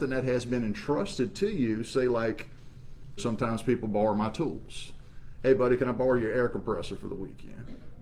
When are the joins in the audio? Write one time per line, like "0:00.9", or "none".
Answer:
0:03.2

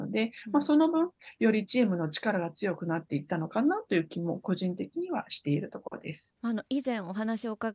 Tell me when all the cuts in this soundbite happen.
0:06.4

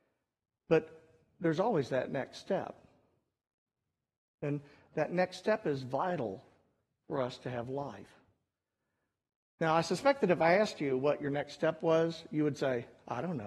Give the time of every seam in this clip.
none

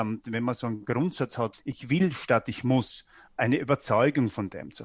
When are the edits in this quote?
0:01.5
0:03.3

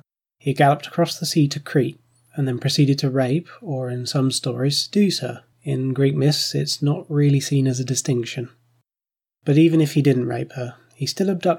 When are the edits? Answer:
0:05.5

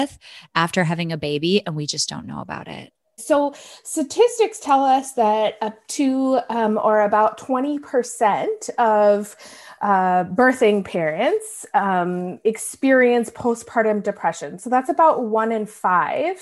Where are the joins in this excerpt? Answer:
0:03.2

